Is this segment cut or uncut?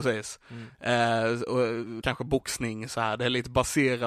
cut